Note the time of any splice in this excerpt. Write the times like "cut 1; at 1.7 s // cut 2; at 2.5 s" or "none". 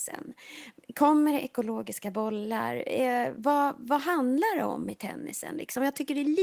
none